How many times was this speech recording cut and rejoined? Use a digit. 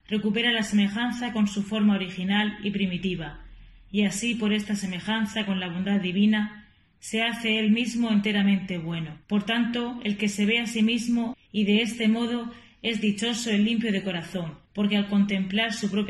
3